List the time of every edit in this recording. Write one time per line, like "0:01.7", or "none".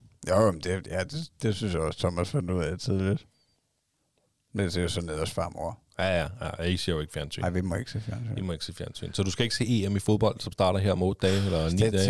none